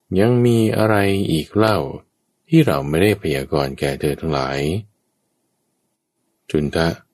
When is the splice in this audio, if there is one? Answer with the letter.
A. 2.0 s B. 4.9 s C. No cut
C